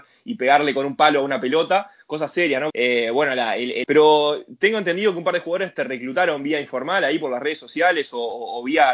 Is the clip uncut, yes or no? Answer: no